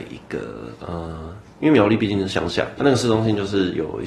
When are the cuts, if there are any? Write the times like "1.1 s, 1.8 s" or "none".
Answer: 2.8 s